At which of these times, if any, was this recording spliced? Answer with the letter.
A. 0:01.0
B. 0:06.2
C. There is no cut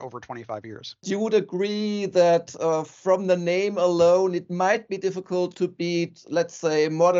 C